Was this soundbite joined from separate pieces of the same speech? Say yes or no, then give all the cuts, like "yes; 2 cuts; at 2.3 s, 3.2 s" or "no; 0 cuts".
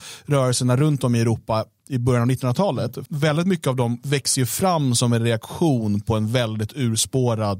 yes; 1 cut; at 3.1 s